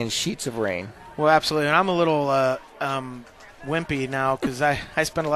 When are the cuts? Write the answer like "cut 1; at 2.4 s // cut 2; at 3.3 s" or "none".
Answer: none